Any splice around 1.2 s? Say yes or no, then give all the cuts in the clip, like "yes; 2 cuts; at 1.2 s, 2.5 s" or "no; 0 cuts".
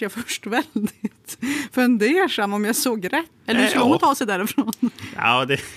no; 1 cut; at 3.4 s